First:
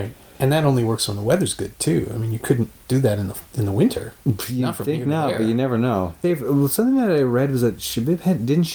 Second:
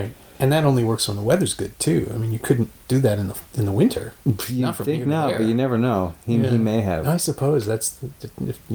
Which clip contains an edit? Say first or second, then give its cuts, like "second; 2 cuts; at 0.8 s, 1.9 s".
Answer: first; 1 cut; at 6.2 s